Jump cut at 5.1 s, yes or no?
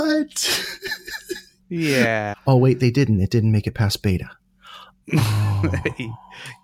no